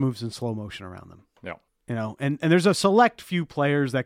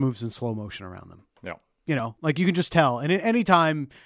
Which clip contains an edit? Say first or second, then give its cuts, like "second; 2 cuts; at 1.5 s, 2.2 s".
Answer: first; 1 cut; at 1.7 s